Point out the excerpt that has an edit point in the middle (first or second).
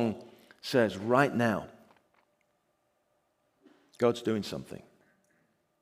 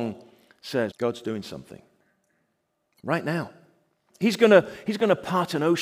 second